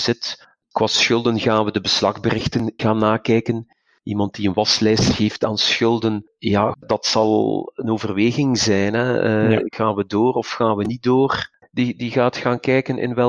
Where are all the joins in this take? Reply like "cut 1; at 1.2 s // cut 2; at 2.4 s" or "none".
cut 1; at 2.8 s // cut 2; at 6.7 s // cut 3; at 11.6 s